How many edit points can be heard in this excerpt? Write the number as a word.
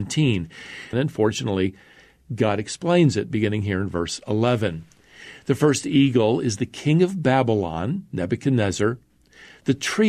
one